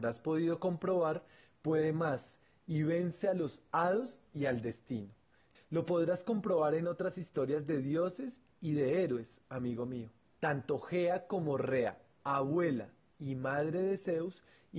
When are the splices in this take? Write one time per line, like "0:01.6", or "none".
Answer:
0:05.5
0:10.3